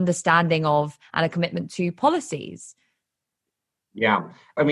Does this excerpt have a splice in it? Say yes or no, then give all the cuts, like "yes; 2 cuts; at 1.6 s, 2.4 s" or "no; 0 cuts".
no; 0 cuts